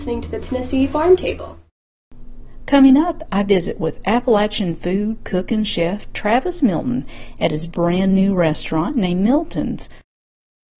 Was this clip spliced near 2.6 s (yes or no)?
no